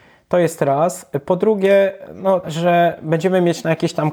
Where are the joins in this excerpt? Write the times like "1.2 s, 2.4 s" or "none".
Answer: 2.4 s